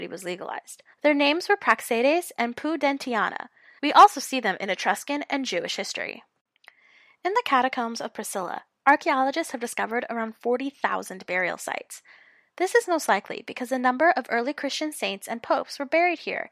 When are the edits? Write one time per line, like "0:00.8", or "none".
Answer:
0:00.9
0:03.8